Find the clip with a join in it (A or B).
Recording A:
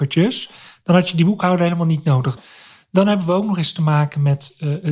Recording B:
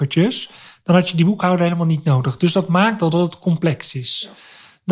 A